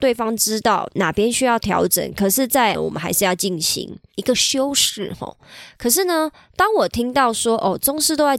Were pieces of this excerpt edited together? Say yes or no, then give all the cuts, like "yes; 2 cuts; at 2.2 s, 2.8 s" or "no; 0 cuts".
yes; 1 cut; at 2.7 s